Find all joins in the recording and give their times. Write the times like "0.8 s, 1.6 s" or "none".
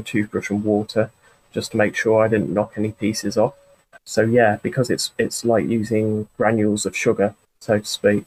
4.0 s